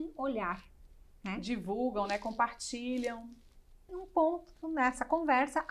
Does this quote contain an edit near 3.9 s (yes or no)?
yes